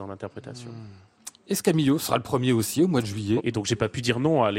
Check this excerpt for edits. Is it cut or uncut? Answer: cut